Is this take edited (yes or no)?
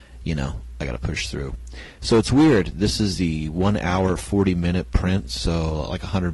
no